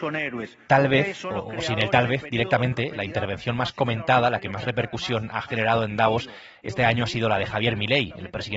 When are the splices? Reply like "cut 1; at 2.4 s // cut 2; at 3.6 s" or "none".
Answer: none